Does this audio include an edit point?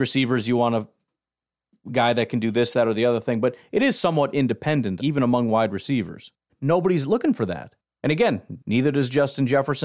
yes; 3 cuts; at 5.0 s, 6.5 s, 8.6 s

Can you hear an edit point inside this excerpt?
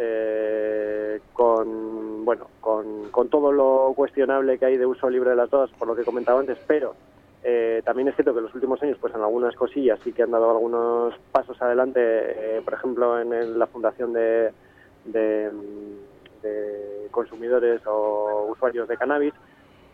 no; 0 cuts

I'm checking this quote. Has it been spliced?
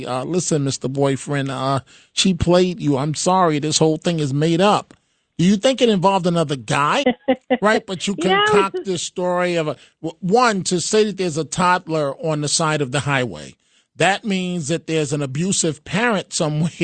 yes; 1 cut; at 7.0 s

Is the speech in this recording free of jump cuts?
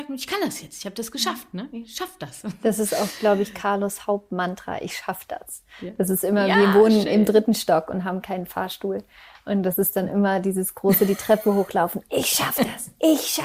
yes; 0 cuts

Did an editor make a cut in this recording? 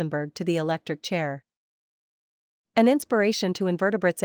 yes; 1 cut; at 2.5 s

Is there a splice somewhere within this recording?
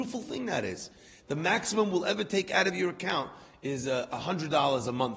no; 0 cuts

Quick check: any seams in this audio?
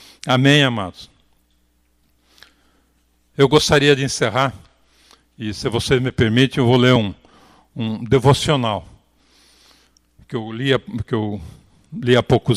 no; 0 cuts

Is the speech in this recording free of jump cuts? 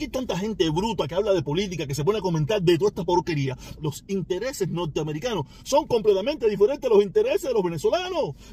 no; 1 cut; at 3.8 s

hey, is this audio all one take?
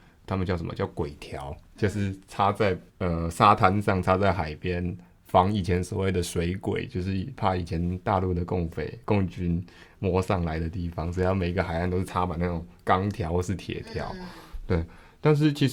no; 1 cut; at 2.9 s

